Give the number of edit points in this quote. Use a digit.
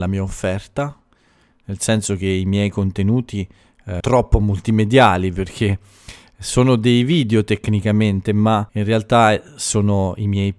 2